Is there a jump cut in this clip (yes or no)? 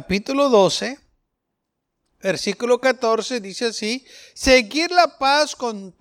no